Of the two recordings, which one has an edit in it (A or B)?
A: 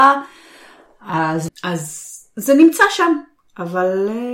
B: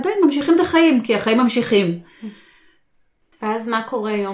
A